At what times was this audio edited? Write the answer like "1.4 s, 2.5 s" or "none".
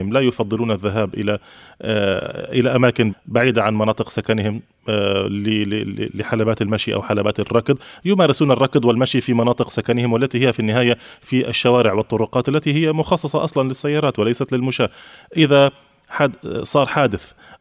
3.1 s